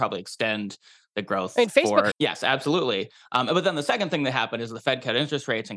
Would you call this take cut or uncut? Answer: cut